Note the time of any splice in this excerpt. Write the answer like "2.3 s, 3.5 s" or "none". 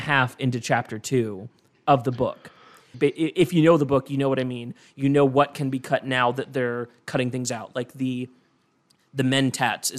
2.9 s